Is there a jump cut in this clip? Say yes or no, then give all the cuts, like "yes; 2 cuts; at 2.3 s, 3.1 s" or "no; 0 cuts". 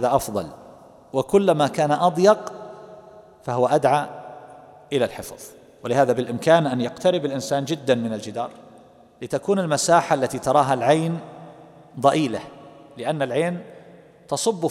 no; 0 cuts